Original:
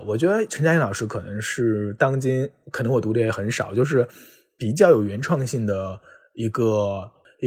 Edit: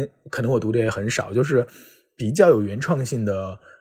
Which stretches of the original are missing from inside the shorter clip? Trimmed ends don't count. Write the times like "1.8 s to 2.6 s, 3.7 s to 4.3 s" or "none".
none